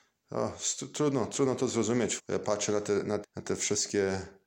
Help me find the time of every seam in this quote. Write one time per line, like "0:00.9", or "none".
0:02.2
0:03.2